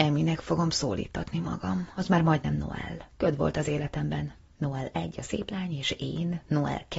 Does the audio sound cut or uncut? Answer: cut